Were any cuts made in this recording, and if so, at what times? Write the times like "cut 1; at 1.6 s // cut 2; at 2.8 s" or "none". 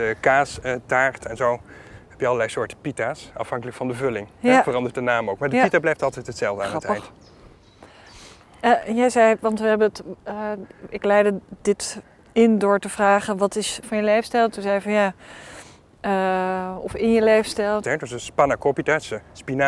cut 1; at 13.8 s // cut 2; at 17.8 s